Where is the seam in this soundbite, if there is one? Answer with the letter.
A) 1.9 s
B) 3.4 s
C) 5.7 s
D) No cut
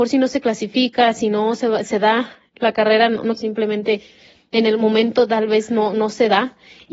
B